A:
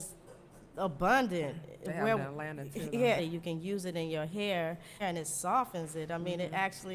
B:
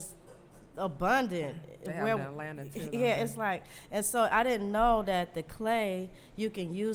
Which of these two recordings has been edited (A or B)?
A